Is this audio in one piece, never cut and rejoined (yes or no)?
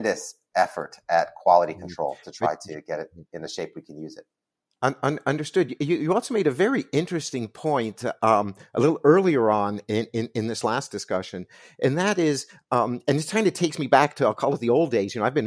yes